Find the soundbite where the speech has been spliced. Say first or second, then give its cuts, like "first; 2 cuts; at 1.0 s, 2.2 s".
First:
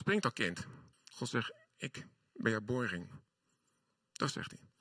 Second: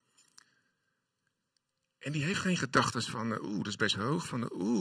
first; 1 cut; at 0.9 s